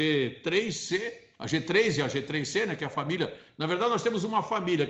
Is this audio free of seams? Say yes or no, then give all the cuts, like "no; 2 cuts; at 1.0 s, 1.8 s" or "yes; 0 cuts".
yes; 0 cuts